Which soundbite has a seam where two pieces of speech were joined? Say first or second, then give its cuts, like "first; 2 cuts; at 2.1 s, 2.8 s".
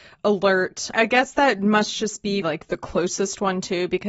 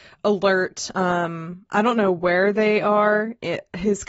first; 2 cuts; at 0.9 s, 2.4 s